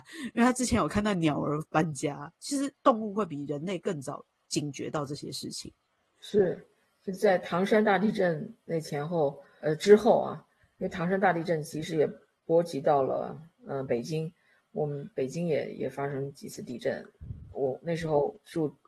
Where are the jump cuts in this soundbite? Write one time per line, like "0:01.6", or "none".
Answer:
0:09.6